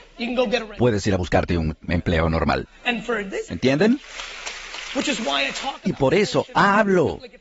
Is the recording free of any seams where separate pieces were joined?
no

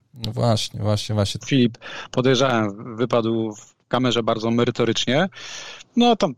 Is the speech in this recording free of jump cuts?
no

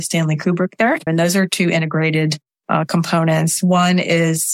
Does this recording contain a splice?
yes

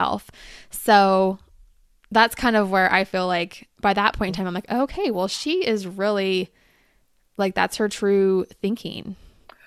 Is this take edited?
no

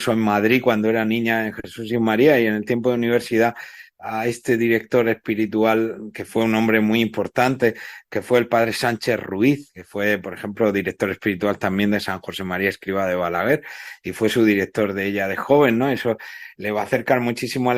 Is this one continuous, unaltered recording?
yes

